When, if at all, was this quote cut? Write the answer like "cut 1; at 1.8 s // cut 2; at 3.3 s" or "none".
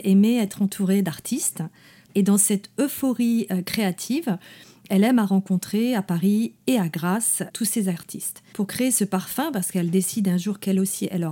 cut 1; at 2.1 s